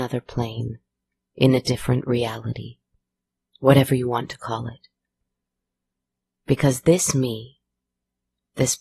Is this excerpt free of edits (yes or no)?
yes